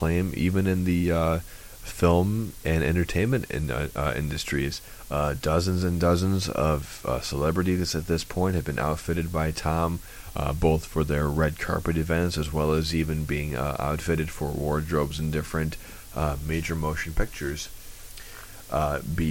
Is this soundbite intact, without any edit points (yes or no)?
yes